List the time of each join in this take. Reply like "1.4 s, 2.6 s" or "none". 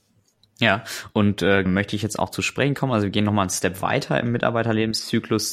1.7 s